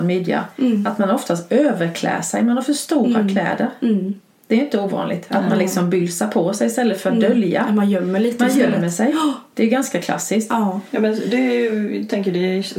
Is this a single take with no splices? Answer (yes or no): yes